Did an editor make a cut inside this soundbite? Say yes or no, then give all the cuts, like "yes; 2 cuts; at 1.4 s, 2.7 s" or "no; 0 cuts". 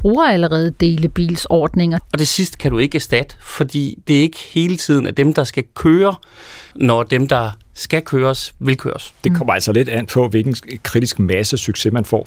yes; 2 cuts; at 2.0 s, 6.7 s